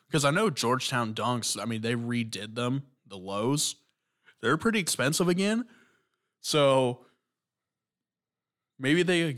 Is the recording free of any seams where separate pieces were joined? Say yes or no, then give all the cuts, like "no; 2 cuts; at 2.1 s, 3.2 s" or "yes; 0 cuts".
yes; 0 cuts